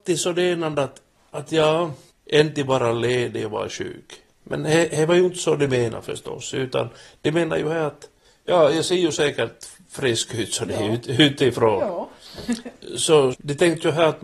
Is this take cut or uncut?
cut